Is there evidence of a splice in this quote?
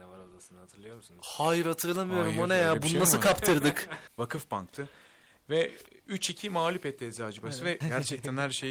yes; 2 cuts; at 4.1 s, 7.8 s

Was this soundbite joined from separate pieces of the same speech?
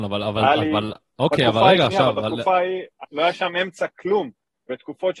yes; 1 cut; at 3.0 s

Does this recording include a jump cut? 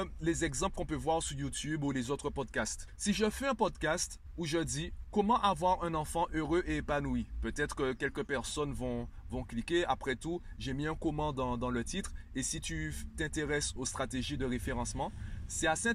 no; 0 cuts

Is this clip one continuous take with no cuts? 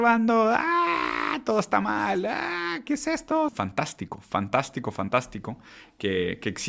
no; 1 cut; at 3.5 s

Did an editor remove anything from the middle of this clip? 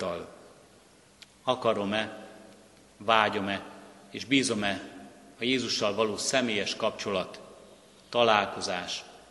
yes; 1 cut; at 1.2 s

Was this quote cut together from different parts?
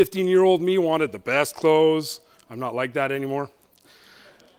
no; 0 cuts

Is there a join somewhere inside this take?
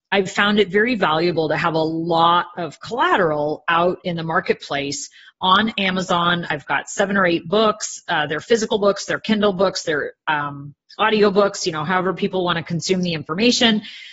no; 0 cuts

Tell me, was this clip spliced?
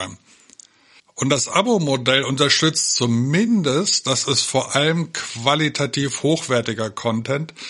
yes; 1 cut; at 1.0 s

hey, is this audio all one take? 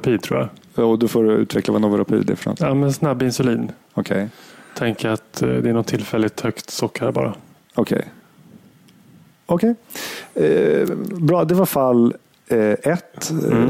yes; 0 cuts

